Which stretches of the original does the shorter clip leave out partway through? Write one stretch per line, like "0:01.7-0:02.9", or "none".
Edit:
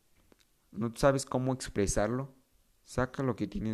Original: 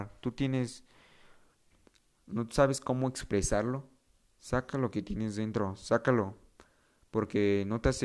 none